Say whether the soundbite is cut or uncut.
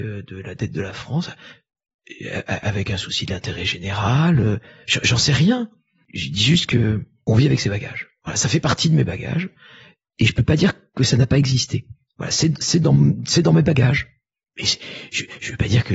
uncut